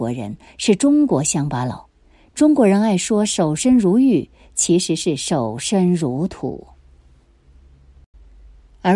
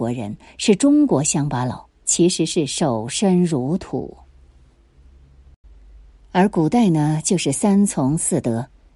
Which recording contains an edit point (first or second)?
second